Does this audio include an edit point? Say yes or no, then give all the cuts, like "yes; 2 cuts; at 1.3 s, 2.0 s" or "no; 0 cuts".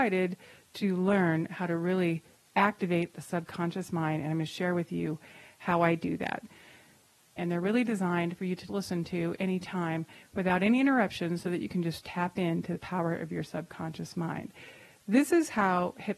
yes; 2 cuts; at 7.4 s, 8.7 s